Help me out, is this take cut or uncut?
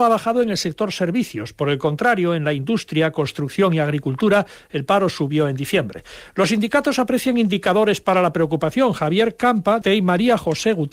cut